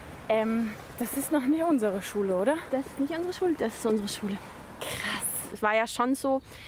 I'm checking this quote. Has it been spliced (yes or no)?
yes